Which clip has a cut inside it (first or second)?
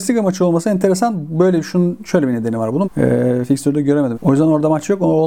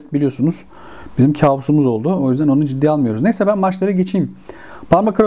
first